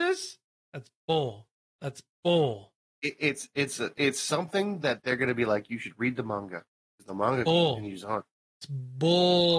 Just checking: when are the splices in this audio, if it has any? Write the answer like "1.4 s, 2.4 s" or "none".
none